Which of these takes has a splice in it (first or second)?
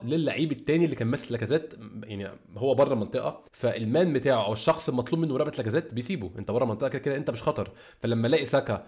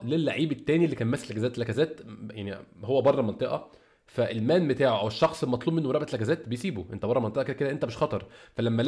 first